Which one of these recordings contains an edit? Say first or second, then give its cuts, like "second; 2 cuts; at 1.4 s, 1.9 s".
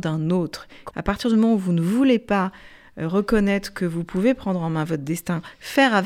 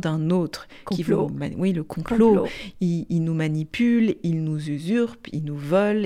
first; 1 cut; at 0.9 s